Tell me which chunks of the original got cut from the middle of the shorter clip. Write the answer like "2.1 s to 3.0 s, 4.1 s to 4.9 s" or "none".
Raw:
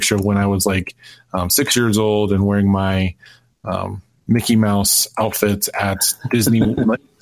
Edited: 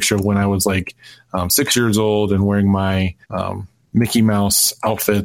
3.2 s to 3.6 s